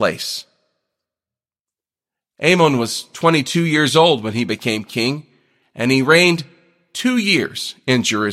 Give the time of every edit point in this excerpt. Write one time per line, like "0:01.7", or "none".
none